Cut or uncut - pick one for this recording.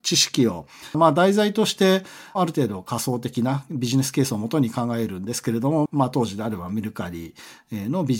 cut